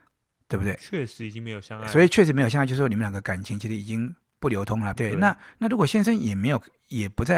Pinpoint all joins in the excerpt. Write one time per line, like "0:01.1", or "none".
0:05.0